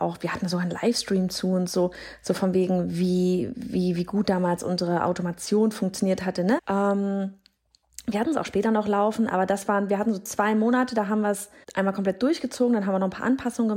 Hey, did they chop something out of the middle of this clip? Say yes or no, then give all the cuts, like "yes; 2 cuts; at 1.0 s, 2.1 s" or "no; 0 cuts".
yes; 2 cuts; at 6.6 s, 11.6 s